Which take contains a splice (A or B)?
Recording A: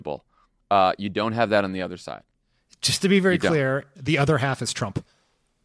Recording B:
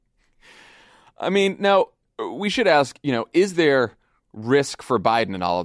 A